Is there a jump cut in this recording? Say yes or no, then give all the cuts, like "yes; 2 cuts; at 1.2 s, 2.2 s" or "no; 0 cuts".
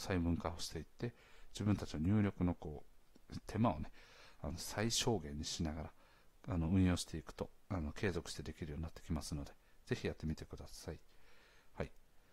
no; 0 cuts